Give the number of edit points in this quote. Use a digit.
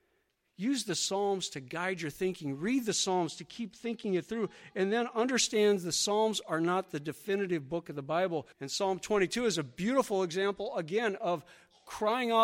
1